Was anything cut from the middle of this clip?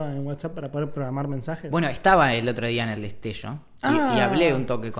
no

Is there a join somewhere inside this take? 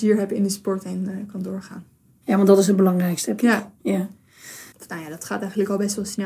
yes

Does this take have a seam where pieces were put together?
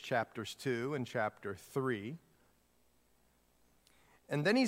no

